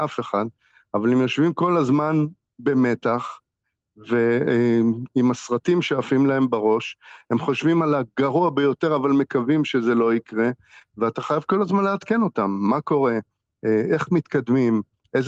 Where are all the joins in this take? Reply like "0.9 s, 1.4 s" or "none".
none